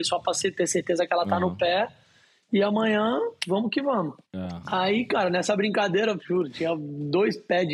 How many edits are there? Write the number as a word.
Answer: two